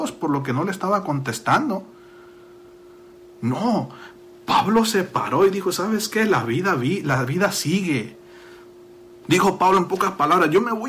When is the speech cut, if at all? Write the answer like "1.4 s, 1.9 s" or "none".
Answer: 9.2 s